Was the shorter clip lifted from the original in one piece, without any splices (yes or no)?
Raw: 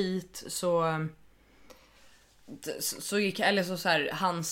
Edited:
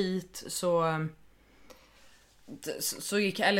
yes